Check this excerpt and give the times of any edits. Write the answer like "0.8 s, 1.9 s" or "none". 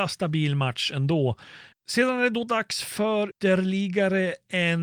1.7 s, 3.3 s